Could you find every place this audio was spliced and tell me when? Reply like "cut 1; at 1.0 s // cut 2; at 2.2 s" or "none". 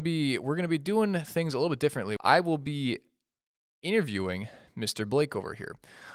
cut 1; at 2.2 s